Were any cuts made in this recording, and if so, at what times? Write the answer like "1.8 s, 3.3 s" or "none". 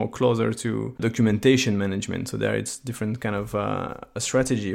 none